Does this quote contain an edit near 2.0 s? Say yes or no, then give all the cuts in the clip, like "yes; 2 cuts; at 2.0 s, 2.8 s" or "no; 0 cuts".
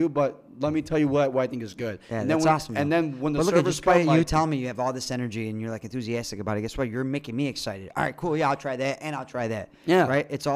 no; 0 cuts